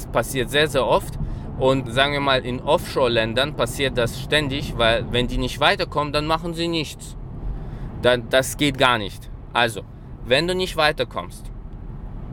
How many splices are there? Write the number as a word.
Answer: one